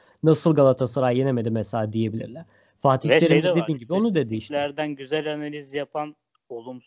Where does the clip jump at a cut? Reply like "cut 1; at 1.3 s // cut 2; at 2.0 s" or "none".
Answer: none